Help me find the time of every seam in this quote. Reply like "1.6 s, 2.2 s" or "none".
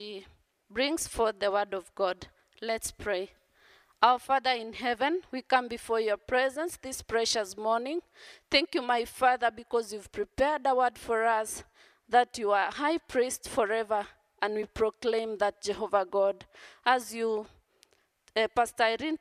none

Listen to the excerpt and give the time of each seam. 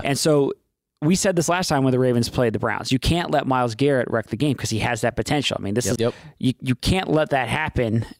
6.0 s

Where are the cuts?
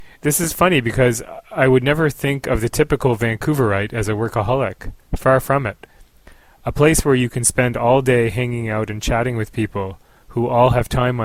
6.6 s

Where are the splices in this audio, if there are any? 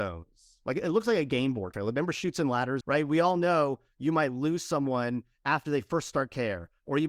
1.7 s, 2.8 s

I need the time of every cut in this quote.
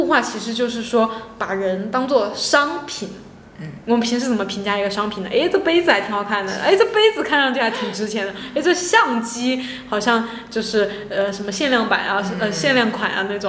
none

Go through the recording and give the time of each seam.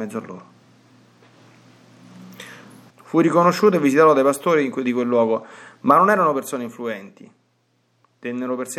2.9 s

